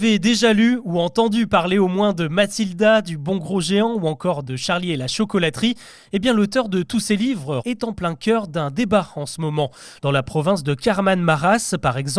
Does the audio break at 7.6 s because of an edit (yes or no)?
yes